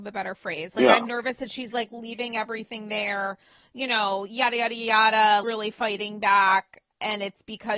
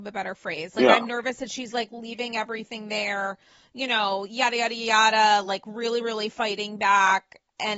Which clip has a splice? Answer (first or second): first